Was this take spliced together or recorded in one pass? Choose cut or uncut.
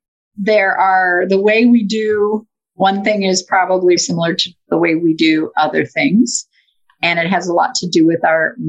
cut